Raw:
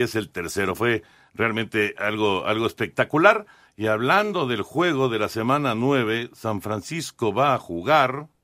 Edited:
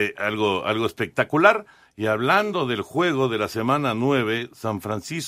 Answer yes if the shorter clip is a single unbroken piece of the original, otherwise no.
yes